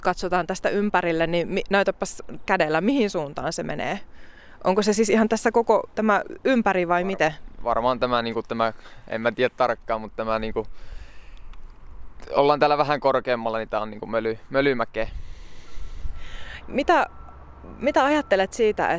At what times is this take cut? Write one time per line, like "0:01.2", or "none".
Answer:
0:16.6